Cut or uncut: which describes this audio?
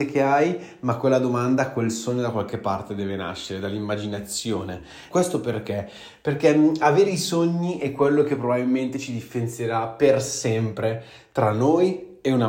cut